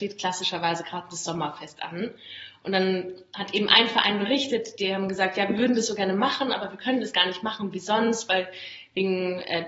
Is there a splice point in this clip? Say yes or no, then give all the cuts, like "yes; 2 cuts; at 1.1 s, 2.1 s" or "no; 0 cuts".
no; 0 cuts